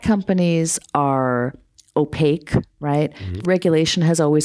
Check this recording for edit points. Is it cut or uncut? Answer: cut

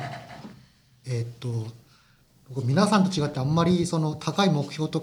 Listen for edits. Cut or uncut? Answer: cut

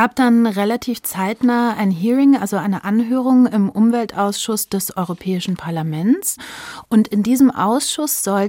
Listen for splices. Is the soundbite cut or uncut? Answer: uncut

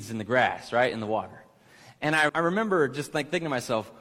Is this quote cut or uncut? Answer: cut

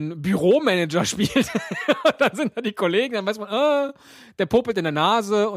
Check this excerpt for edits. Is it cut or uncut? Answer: uncut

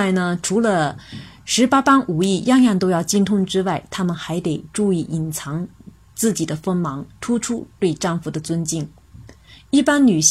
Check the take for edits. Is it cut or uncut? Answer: uncut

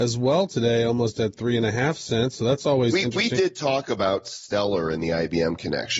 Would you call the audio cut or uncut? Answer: uncut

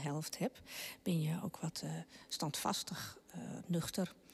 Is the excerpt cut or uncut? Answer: uncut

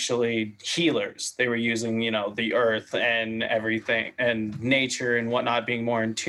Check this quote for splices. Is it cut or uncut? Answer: uncut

